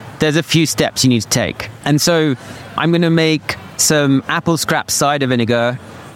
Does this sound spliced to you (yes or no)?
yes